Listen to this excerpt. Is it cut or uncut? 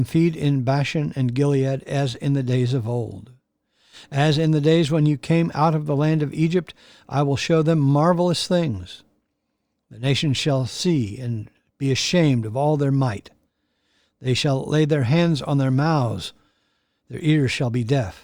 uncut